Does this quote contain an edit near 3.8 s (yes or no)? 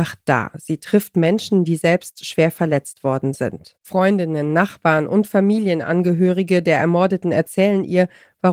yes